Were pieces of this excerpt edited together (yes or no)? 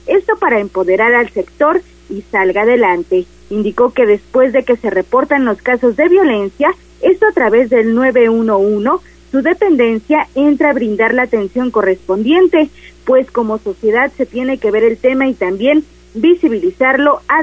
no